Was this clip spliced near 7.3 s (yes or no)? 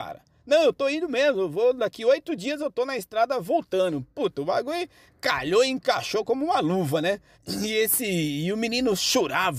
yes